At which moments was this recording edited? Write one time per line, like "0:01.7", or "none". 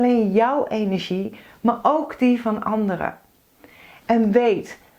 none